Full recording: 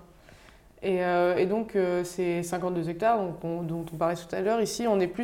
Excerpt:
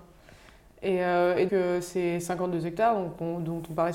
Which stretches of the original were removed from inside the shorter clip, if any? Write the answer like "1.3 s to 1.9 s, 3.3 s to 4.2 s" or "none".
1.5 s to 1.7 s